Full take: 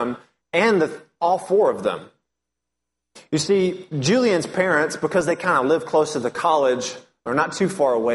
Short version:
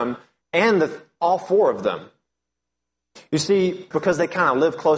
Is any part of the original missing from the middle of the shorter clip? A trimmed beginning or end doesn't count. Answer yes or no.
yes